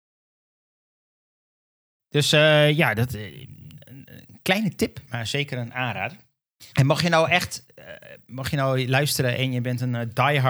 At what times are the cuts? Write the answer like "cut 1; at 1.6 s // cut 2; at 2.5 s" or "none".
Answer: cut 1; at 5.1 s // cut 2; at 6.7 s